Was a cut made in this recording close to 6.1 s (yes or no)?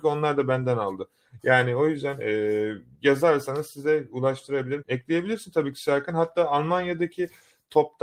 no